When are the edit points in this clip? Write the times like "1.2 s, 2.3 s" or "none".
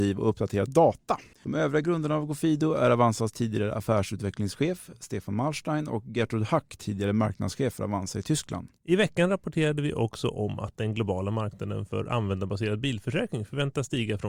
1.3 s, 8.8 s